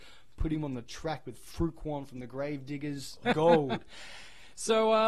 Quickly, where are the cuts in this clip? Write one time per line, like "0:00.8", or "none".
0:03.2